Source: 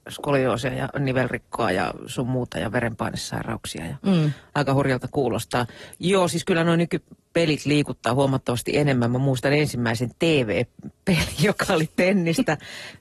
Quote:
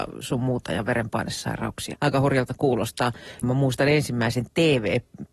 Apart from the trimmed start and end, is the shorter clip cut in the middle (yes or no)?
yes